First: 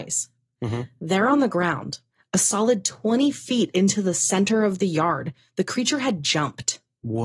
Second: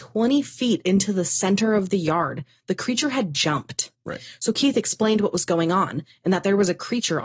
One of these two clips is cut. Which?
second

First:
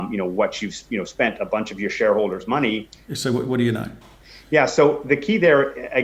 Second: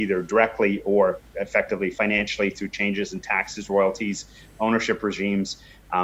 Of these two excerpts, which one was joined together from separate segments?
first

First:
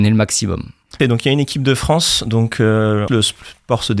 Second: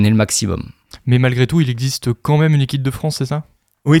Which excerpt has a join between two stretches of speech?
first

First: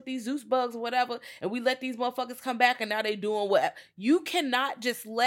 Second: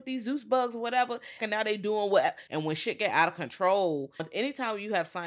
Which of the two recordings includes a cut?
second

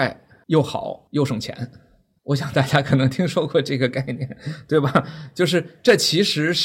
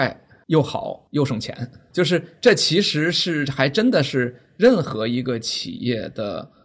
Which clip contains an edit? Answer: second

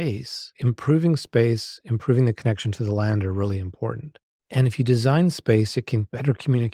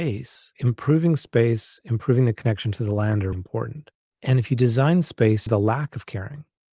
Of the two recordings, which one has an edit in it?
second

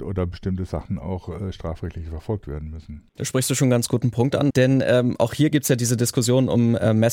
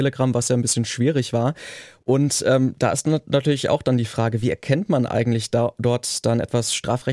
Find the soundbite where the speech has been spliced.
first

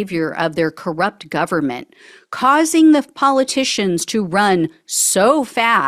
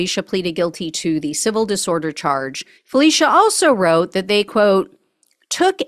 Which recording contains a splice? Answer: second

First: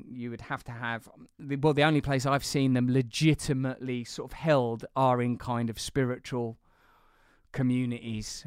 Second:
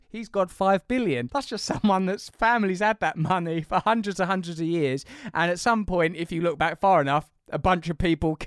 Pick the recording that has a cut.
second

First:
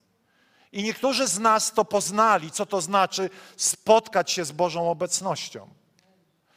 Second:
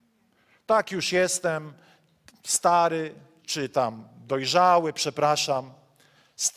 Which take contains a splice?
second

